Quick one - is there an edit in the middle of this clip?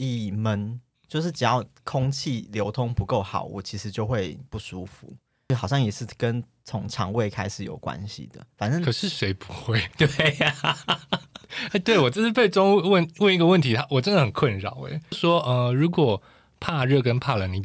no; 0 cuts

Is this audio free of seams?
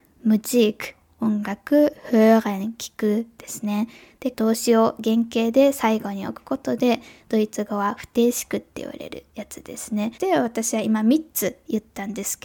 no; 2 cuts; at 4.3 s, 10.2 s

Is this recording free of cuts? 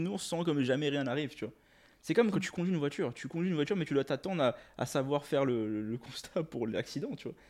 yes; 0 cuts

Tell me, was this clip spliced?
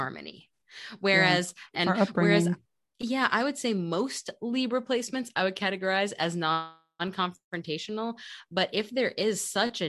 yes; 1 cut; at 1.7 s

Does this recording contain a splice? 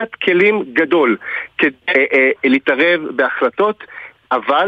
yes; 1 cut; at 1.9 s

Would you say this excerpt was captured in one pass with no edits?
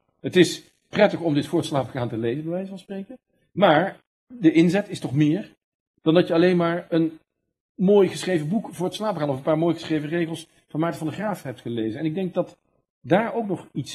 yes; 0 cuts

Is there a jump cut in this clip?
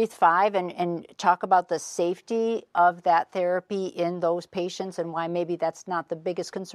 no; 0 cuts

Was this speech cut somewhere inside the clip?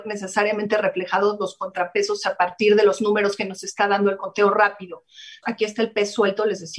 yes; 1 cut; at 5.4 s

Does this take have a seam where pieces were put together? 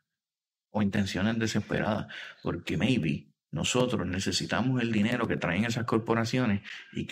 no; 0 cuts

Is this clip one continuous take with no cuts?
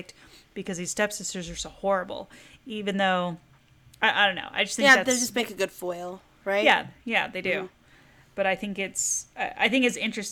yes; 0 cuts

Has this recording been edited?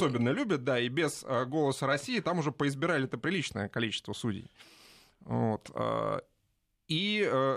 no; 0 cuts

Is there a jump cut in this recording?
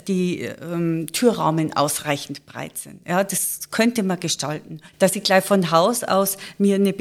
yes; 1 cut; at 4.9 s

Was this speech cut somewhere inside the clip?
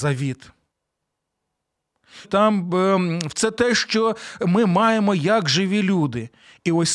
yes; 1 cut; at 2.2 s

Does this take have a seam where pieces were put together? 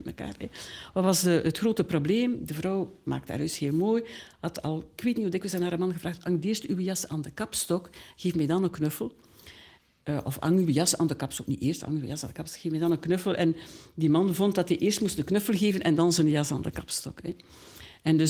no; 0 cuts

